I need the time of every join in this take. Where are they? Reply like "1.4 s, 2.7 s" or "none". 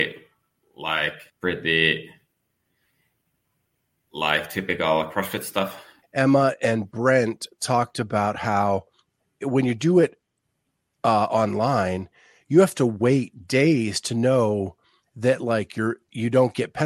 1.3 s, 6.0 s